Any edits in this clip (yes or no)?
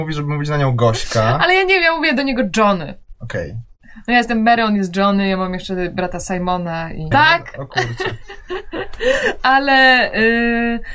yes